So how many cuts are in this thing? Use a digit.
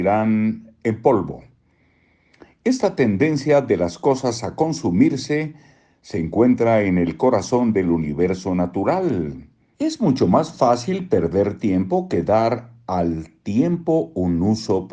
1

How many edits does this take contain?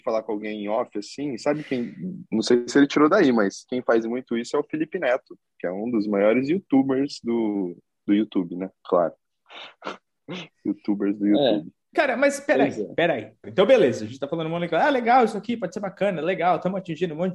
1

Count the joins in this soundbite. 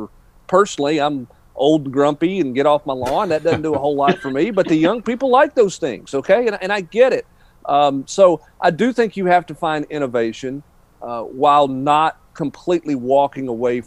1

